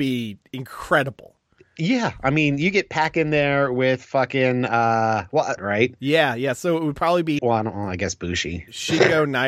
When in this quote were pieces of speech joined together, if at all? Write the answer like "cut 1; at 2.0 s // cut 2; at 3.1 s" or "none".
cut 1; at 5.6 s // cut 2; at 7.4 s